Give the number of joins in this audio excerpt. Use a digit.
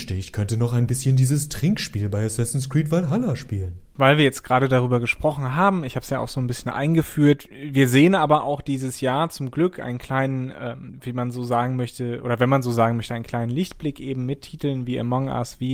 0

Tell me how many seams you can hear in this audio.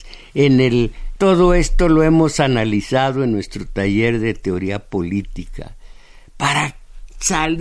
1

